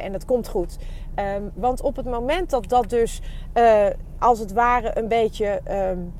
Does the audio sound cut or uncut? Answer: cut